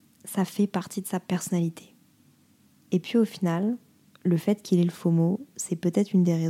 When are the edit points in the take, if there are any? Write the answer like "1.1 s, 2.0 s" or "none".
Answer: 2.8 s